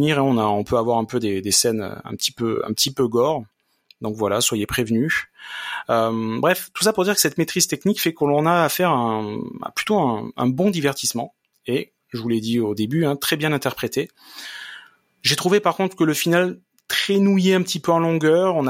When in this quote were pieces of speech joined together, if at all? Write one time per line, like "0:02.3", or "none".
none

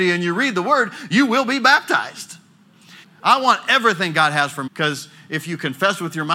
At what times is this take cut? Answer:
0:03.0
0:04.7

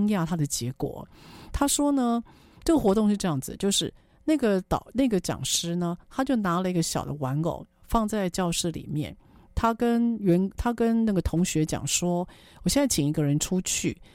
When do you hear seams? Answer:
none

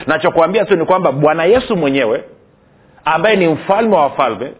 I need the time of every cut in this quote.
none

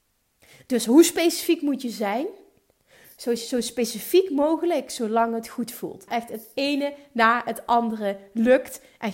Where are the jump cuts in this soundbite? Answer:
0:03.4
0:06.1

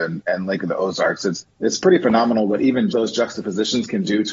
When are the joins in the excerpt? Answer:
0:01.5
0:02.9

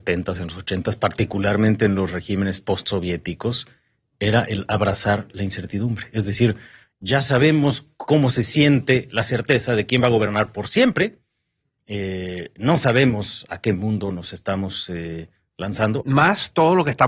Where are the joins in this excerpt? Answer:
0:16.0

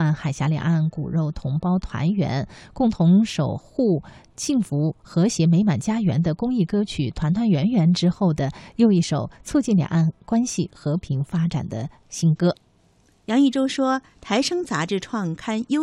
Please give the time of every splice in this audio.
none

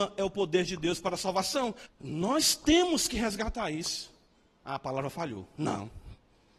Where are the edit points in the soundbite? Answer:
0:01.9
0:04.6

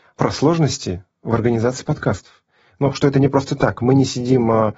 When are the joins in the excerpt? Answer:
none

